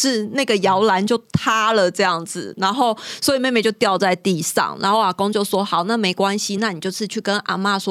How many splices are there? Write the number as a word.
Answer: zero